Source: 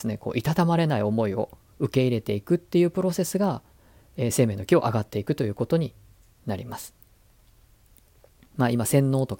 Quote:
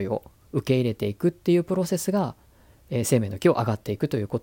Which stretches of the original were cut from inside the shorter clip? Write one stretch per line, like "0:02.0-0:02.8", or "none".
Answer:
none